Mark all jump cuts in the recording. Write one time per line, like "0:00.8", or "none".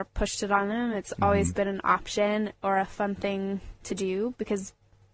none